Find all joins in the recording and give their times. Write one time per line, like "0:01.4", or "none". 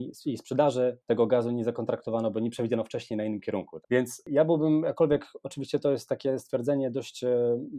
0:03.8